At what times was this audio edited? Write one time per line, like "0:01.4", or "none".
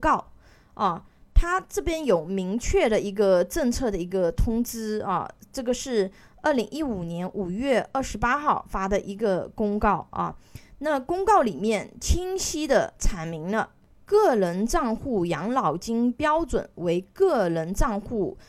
none